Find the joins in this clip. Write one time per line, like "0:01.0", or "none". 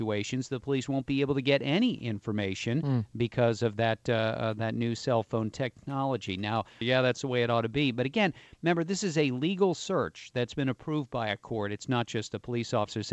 0:06.8